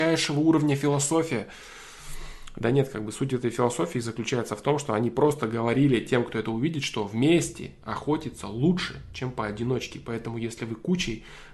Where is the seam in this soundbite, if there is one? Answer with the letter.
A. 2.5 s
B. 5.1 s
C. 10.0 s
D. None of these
D